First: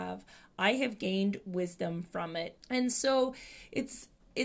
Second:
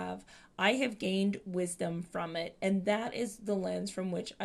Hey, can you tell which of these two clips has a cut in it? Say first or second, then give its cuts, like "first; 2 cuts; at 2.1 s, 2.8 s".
first; 1 cut; at 2.6 s